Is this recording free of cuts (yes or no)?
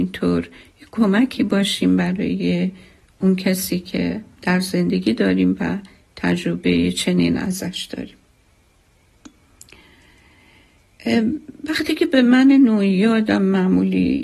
no